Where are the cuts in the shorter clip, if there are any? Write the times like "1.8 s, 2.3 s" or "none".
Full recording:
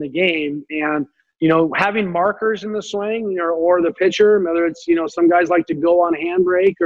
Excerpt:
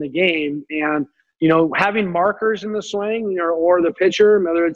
none